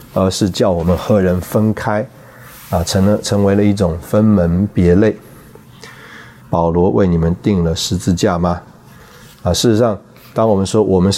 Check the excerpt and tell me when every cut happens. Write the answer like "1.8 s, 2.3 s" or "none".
6.4 s